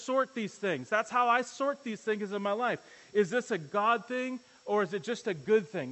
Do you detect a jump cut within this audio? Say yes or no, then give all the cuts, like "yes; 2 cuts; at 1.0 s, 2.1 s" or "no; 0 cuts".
no; 0 cuts